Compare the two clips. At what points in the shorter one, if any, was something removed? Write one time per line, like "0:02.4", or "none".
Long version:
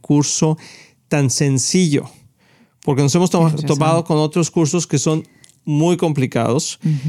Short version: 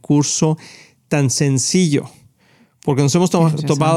none